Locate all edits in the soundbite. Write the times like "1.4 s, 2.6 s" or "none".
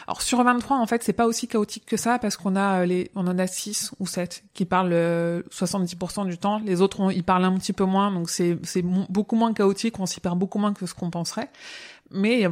none